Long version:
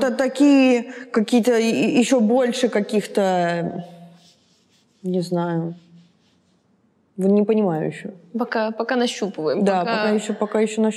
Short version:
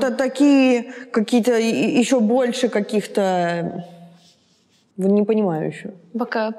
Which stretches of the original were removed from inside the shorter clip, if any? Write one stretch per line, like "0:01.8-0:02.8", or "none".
0:04.9-0:07.1